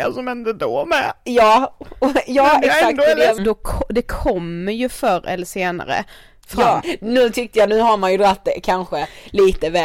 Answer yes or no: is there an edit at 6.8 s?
yes